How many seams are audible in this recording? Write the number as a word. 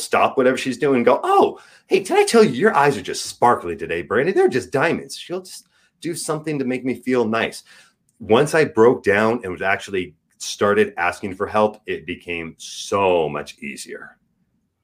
zero